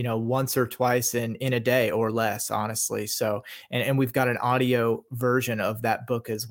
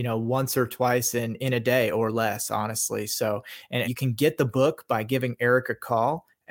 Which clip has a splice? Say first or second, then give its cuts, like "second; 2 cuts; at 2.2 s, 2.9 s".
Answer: second; 1 cut; at 3.8 s